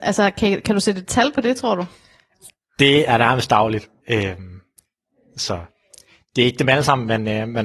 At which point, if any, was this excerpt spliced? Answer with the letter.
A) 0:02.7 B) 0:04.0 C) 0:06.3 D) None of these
B